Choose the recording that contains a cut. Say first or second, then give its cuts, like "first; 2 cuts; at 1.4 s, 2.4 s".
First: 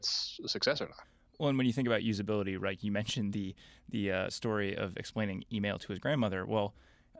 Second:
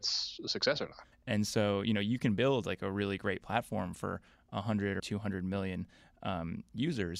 second; 2 cuts; at 1.1 s, 5.0 s